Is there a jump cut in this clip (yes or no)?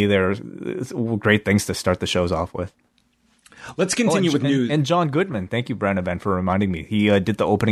no